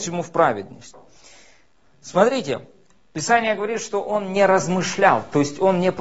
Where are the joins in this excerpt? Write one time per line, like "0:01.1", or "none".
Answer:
none